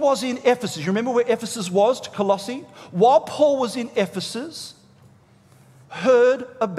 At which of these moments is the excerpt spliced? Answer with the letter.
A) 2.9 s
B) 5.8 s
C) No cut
B